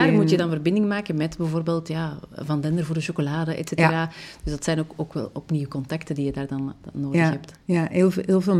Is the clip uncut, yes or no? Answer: no